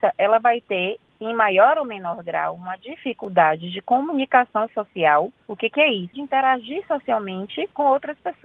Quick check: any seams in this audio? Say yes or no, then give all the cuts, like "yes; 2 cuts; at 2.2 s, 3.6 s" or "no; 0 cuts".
yes; 1 cut; at 6.1 s